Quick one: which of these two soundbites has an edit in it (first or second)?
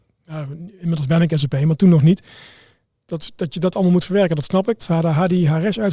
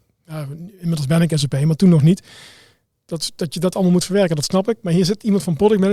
first